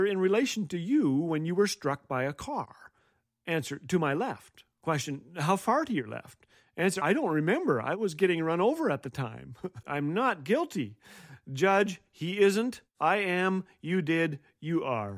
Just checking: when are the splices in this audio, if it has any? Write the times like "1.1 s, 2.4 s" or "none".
7.0 s, 9.8 s